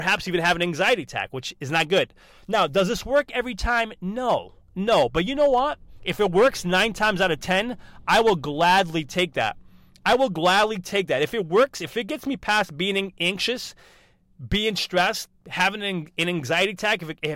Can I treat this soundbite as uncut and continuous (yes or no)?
yes